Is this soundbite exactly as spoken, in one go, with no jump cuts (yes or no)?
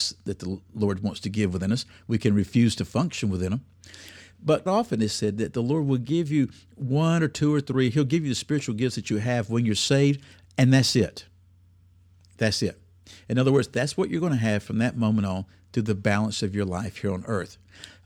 no